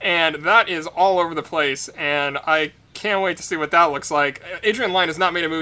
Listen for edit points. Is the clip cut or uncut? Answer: uncut